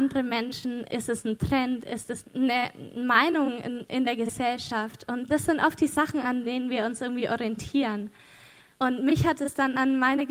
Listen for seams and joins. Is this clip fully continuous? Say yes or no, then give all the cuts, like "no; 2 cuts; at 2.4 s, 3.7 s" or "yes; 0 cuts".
no; 2 cuts; at 2.2 s, 8.8 s